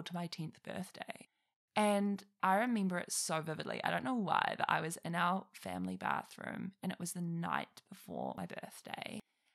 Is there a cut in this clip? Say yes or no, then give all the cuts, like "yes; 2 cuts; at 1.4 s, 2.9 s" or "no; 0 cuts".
yes; 1 cut; at 2.4 s